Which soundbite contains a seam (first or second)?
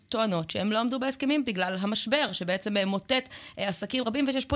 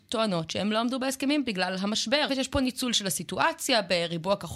second